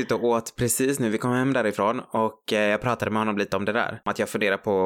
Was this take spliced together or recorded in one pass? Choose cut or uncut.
uncut